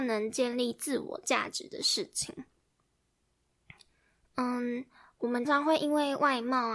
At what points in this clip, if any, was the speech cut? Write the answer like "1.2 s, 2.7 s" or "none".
5.4 s